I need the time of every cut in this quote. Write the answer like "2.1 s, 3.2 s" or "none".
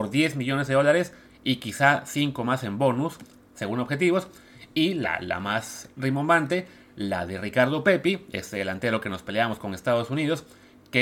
none